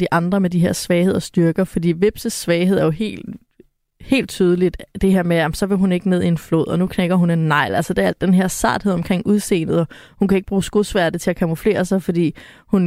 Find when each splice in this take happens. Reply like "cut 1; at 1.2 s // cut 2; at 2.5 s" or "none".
none

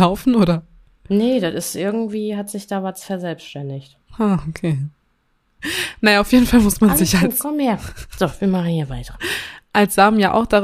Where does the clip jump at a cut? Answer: none

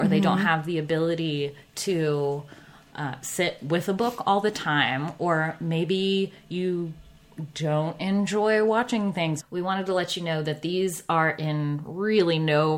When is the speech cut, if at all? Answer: cut 1; at 9.4 s

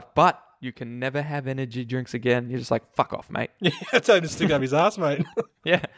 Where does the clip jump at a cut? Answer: none

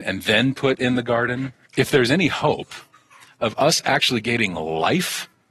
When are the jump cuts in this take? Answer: cut 1; at 1.6 s

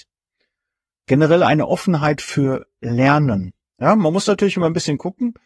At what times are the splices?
cut 1; at 3.6 s

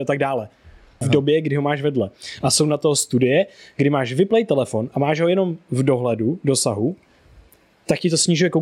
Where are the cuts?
cut 1; at 1.0 s

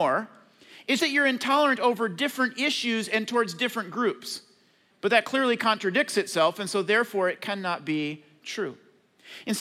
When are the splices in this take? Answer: cut 1; at 1.0 s // cut 2; at 4.9 s

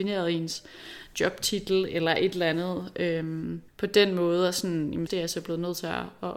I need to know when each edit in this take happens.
cut 1; at 3.7 s // cut 2; at 5.1 s

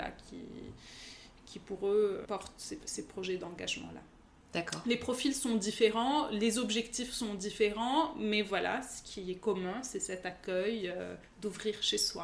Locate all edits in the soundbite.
cut 1; at 2.2 s

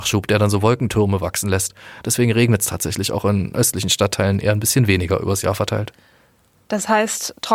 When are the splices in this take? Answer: cut 1; at 2.0 s

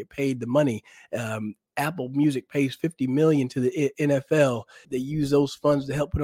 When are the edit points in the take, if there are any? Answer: cut 1; at 4.8 s

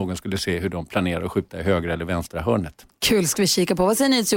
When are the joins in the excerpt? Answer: none

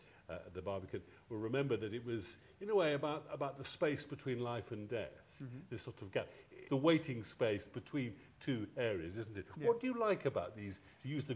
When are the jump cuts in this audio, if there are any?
cut 1; at 6.6 s

